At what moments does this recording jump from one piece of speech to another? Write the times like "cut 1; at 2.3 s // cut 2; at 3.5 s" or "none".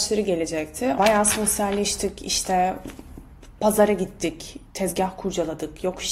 cut 1; at 1.0 s

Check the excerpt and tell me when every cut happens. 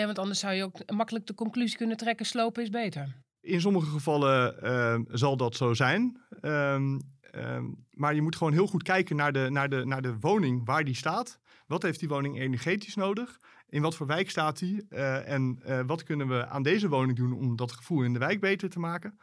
none

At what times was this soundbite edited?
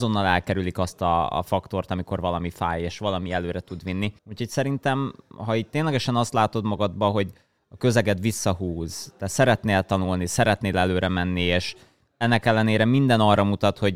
cut 1; at 4.2 s

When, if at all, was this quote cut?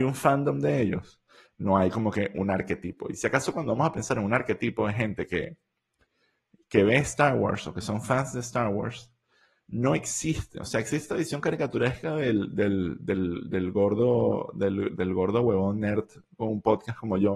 cut 1; at 1.4 s

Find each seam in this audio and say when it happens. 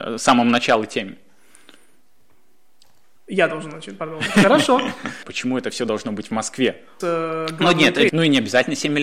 cut 1; at 5.2 s // cut 2; at 7.0 s // cut 3; at 8.1 s

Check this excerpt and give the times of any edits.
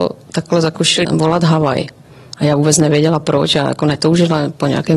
cut 1; at 1.0 s

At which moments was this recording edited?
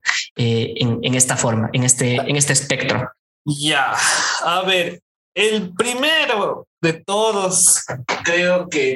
none

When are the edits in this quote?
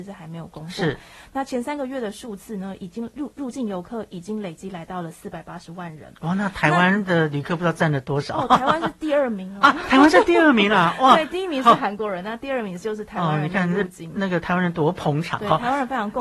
none

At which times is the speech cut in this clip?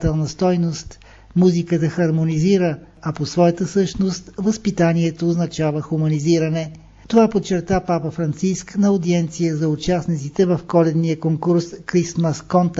none

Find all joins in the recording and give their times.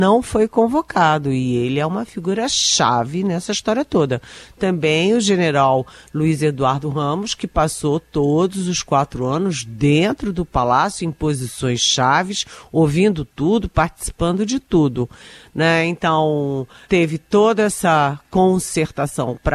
cut 1; at 16.8 s

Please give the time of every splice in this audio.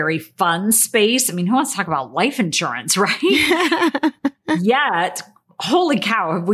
none

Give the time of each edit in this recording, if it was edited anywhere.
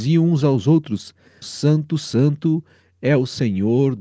cut 1; at 1.4 s

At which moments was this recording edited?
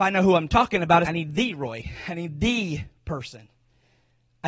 cut 1; at 1.0 s

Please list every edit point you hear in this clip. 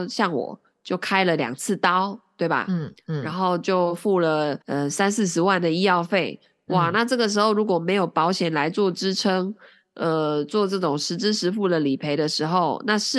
cut 1; at 4.6 s

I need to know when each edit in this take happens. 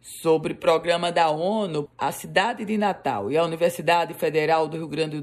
cut 1; at 1.9 s

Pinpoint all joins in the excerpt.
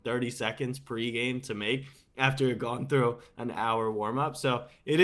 none

